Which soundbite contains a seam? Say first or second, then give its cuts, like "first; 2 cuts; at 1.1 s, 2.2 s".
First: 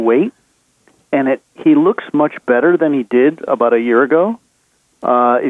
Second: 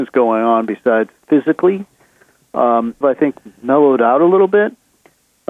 second; 1 cut; at 3.0 s